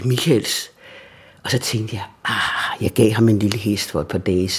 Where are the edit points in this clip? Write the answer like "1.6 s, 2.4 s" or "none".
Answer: none

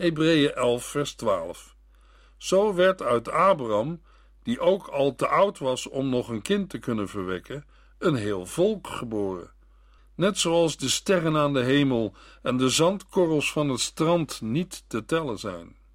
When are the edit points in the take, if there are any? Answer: 10.0 s

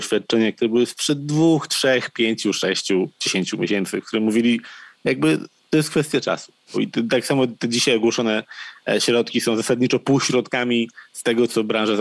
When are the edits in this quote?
6.7 s

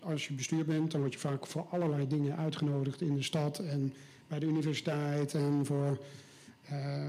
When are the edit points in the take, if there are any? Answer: none

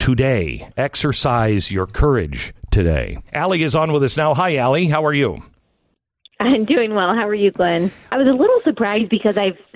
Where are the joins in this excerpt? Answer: 3.3 s, 8.1 s

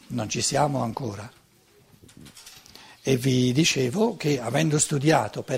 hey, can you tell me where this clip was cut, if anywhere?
none

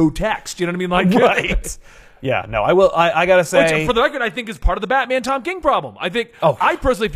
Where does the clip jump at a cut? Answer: none

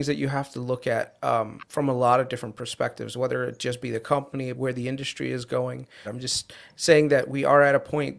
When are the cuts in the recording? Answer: 4.5 s, 6.0 s

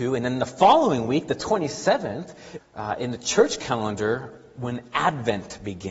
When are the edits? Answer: 2.6 s

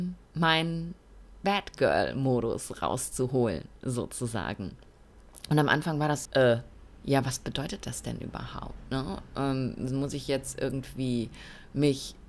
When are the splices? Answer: 6.3 s

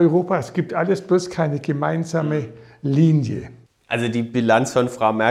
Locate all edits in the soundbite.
3.7 s

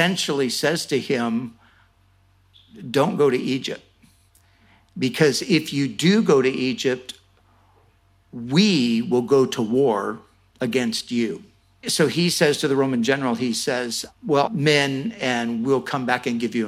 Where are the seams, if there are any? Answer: 11.8 s, 14.5 s

